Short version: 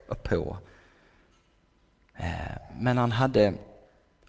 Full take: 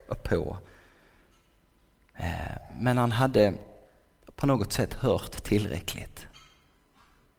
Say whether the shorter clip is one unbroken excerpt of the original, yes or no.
yes